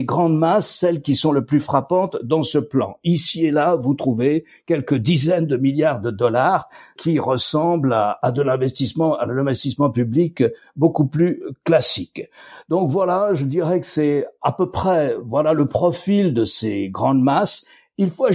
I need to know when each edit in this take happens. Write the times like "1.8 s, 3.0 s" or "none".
none